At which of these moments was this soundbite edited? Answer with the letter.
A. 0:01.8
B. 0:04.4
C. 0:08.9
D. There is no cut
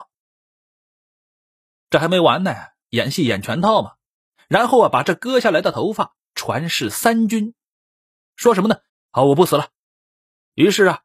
C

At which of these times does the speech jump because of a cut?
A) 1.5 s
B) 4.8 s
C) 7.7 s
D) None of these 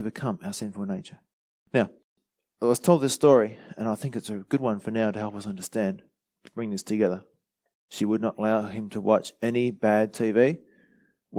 C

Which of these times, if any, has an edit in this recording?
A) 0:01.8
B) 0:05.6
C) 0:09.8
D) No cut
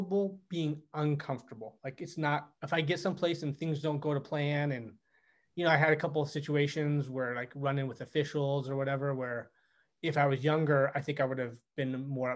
D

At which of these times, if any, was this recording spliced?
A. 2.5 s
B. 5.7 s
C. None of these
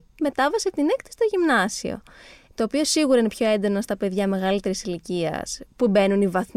A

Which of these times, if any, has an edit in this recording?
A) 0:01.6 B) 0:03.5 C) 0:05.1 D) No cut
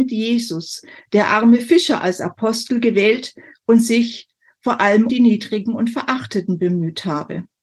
C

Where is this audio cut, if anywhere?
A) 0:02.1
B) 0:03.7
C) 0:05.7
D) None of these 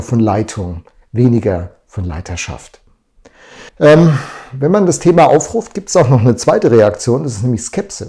B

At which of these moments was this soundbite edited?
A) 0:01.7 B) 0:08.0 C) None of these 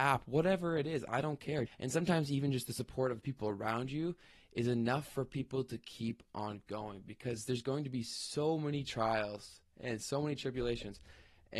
A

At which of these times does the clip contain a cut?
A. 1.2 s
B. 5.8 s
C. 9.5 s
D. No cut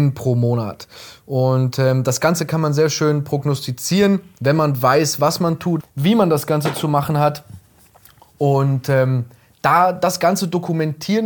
B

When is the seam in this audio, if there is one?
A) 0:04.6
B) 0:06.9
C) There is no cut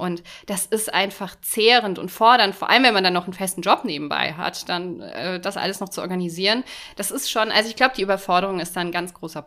C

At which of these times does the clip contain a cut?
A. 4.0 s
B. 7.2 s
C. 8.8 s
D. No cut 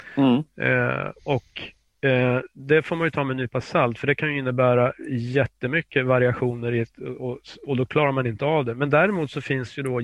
D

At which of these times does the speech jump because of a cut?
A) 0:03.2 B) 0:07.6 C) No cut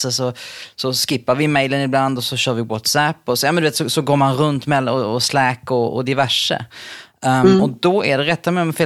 C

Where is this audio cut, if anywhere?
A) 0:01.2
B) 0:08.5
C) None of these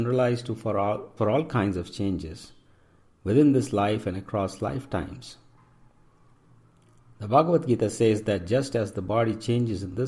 A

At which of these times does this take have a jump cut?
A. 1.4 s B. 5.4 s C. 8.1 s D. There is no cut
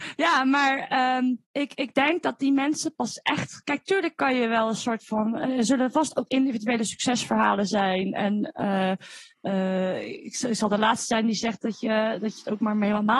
A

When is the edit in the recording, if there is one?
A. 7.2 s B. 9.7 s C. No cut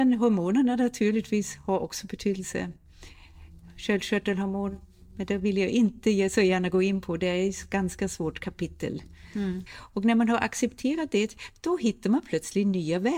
B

